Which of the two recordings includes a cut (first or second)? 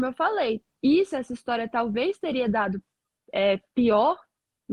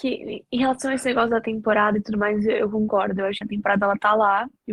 second